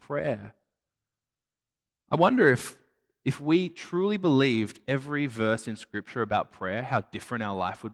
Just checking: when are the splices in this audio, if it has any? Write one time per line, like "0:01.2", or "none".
none